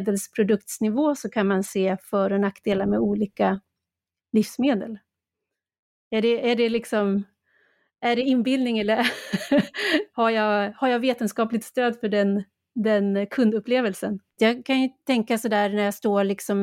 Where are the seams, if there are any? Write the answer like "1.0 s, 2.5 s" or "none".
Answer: 14.4 s